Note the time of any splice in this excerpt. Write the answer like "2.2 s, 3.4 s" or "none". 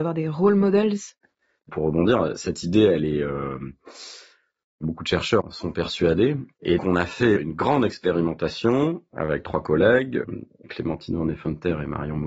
6.8 s, 10.6 s